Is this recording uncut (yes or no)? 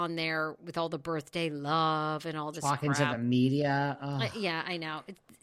yes